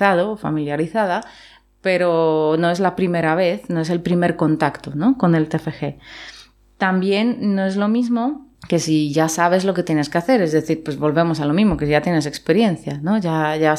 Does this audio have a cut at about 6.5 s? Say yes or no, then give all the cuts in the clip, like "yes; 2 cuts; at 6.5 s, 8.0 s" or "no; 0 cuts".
no; 1 cut; at 8.5 s